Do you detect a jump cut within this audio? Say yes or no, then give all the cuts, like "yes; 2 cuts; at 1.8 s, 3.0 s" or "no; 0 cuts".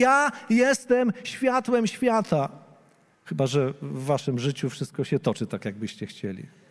yes; 1 cut; at 3.1 s